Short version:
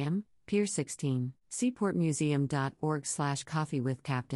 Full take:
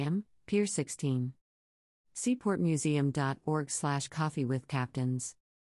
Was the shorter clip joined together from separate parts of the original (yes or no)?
yes